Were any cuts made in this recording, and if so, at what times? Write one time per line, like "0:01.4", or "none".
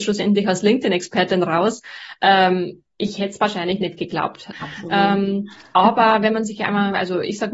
0:02.9
0:04.5